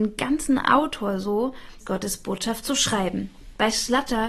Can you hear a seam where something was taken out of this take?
yes; 1 cut; at 1.8 s

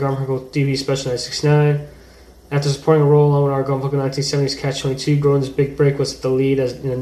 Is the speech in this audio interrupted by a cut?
no; 0 cuts

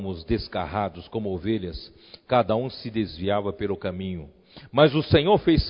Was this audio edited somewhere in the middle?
no; 0 cuts

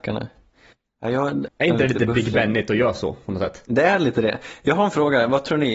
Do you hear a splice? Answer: yes; 1 cut; at 1.5 s

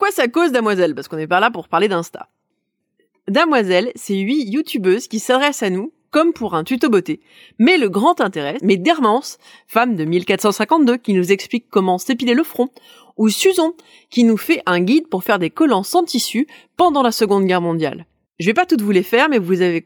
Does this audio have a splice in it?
yes; 2 cuts; at 8.6 s, 18.3 s

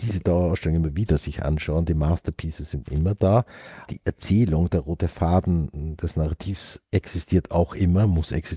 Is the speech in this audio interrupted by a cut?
yes; 1 cut; at 6.9 s

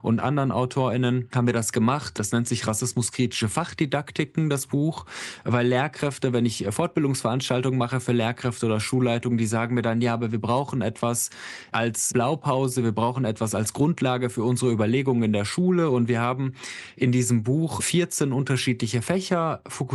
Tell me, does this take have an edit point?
no; 0 cuts

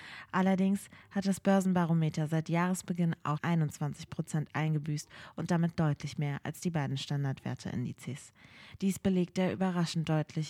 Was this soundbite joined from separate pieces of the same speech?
yes; 2 cuts; at 3.4 s, 8.8 s

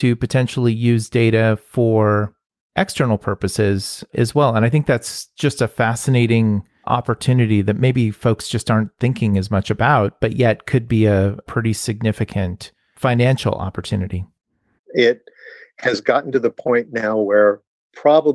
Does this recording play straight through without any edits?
no; 1 cut; at 14.8 s

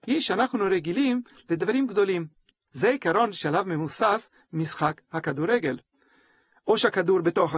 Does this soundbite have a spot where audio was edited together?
yes; 1 cut; at 2.5 s

